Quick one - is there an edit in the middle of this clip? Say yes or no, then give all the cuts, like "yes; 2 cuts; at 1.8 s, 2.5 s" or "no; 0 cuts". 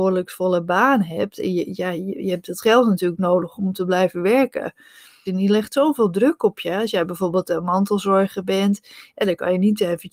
yes; 2 cuts; at 3.6 s, 5.3 s